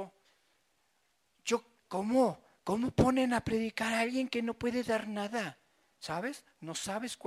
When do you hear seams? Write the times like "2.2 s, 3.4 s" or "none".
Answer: 1.8 s